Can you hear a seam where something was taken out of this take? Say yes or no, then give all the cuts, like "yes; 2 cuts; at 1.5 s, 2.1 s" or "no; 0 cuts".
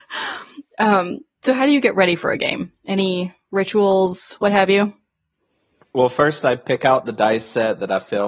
no; 0 cuts